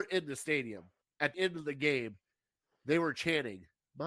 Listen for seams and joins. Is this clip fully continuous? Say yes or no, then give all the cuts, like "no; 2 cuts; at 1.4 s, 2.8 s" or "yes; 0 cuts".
no; 1 cut; at 1.3 s